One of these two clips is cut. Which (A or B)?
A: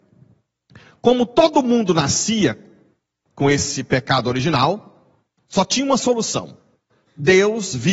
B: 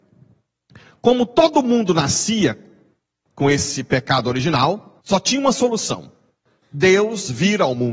B